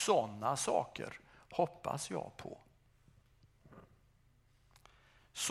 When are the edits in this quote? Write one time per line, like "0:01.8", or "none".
none

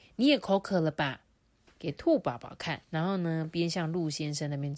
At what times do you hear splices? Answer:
0:01.7
0:02.8

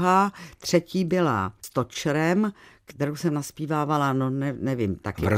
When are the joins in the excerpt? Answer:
0:01.6

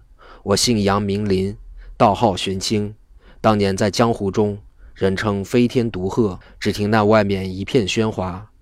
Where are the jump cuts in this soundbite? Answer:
0:06.4

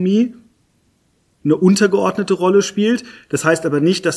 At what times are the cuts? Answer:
none

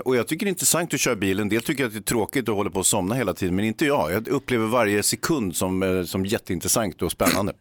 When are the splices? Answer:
none

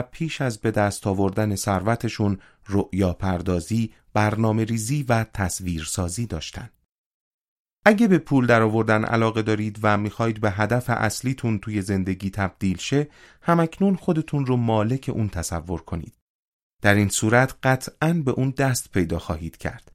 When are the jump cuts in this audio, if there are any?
0:04.1
0:07.7

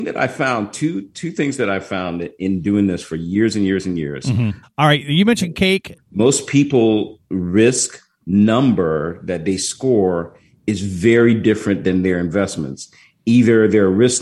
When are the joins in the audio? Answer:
0:04.6
0:06.0

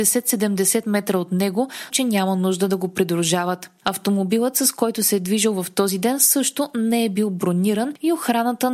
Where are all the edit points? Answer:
0:01.9

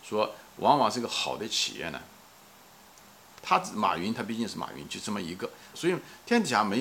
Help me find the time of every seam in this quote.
0:03.4
0:05.7

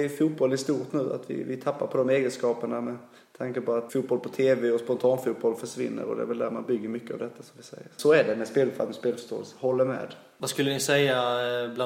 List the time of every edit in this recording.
0:03.9

